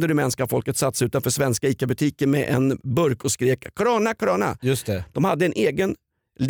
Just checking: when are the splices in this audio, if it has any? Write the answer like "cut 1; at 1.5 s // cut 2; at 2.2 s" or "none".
cut 1; at 4.2 s